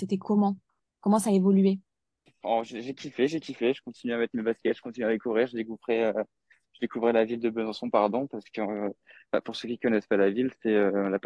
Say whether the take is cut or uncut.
uncut